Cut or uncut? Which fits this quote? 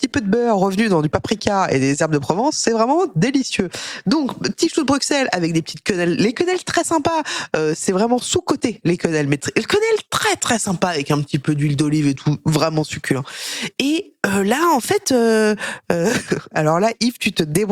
uncut